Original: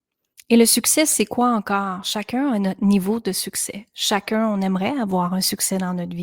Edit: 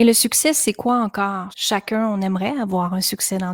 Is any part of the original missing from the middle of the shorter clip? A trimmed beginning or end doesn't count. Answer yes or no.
yes